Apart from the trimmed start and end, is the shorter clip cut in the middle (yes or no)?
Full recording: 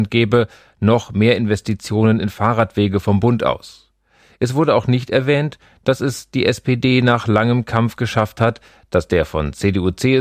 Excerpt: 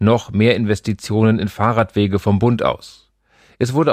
no